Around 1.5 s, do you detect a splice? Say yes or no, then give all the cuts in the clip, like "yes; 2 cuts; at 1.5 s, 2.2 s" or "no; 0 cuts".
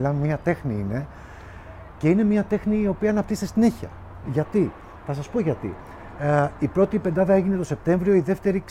no; 1 cut; at 4.2 s